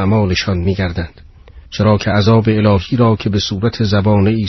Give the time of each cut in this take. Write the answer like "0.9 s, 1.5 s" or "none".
1.7 s